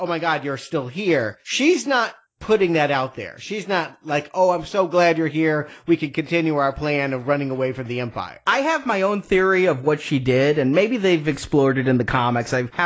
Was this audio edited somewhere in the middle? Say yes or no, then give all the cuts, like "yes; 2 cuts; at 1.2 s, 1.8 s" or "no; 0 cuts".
no; 0 cuts